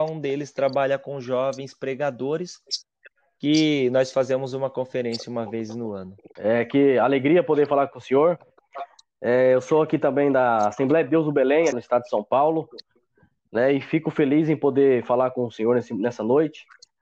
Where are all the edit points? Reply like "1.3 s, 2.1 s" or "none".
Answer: 6.4 s, 11.7 s